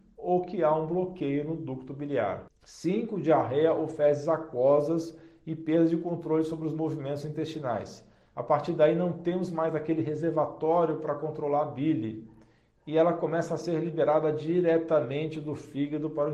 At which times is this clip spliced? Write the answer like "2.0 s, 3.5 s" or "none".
8.3 s